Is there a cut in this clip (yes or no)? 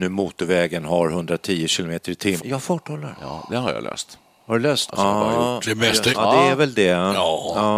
yes